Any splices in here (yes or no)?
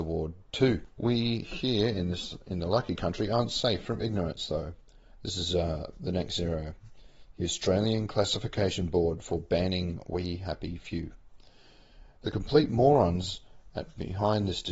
no